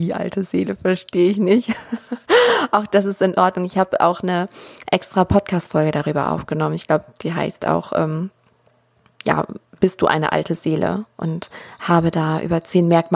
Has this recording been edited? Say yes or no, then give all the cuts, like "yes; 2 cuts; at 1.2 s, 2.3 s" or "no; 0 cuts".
no; 0 cuts